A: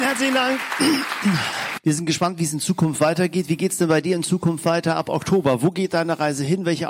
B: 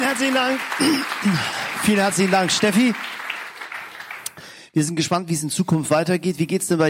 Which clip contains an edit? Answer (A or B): A